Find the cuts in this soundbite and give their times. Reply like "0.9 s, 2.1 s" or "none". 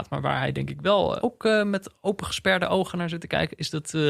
1.2 s